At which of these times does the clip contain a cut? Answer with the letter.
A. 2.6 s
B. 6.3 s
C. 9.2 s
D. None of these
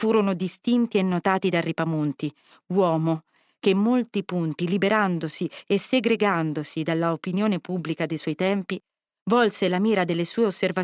D